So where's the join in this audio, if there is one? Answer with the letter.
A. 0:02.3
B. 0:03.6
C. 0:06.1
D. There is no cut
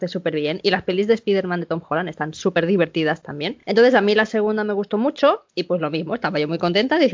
D